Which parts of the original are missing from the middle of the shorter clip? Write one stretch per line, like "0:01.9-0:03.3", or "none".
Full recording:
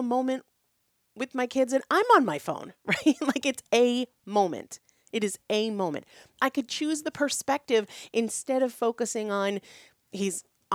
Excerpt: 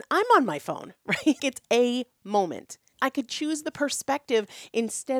0:03.2-0:03.4
0:04.9-0:06.3